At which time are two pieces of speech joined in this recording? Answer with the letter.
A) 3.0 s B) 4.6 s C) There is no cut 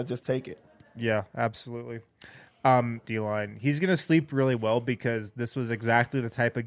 A